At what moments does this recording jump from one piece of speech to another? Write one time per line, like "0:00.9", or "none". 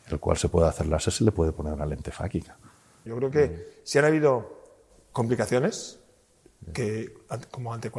0:03.1